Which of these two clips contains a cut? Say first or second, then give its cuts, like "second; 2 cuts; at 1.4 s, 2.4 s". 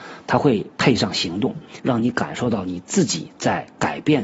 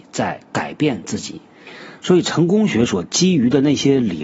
first; 1 cut; at 1.8 s